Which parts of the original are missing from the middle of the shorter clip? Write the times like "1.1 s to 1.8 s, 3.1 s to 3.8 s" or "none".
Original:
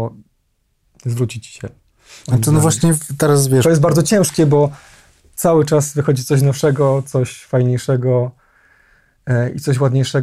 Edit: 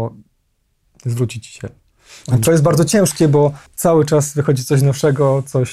2.4 s to 3.6 s, 4.8 s to 5.3 s